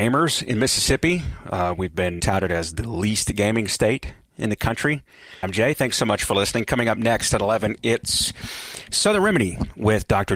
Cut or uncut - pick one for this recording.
cut